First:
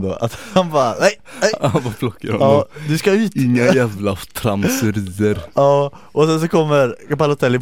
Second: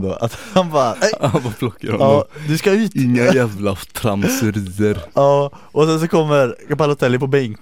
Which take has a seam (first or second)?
second